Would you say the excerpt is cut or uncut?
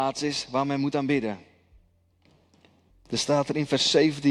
cut